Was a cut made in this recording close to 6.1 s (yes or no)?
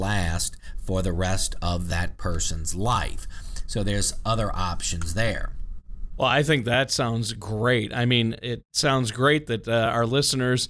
no